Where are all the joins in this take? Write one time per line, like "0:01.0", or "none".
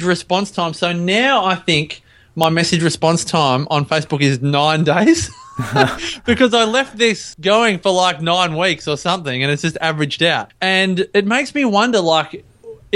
none